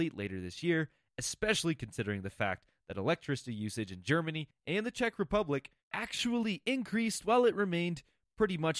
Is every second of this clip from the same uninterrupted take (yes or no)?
no